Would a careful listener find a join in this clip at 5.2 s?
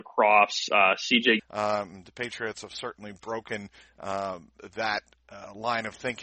no; 1 cut; at 1.4 s

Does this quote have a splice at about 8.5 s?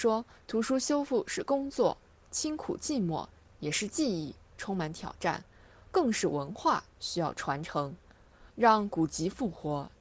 yes; 1 cut; at 8.5 s

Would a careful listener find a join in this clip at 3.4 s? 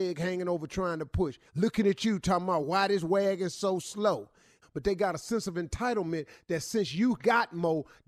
no; 2 cuts; at 1.5 s, 4.6 s

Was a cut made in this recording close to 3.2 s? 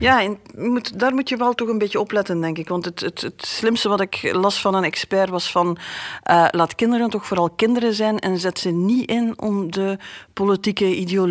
no; 0 cuts

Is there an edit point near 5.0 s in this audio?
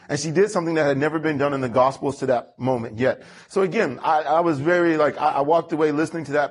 no; 0 cuts

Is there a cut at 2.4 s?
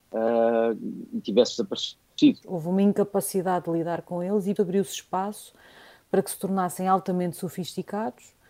yes; 2 cuts; at 2.4 s, 4.6 s

